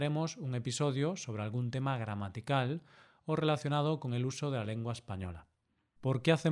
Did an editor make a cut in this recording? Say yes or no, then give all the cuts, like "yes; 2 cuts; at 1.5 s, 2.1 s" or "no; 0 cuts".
no; 0 cuts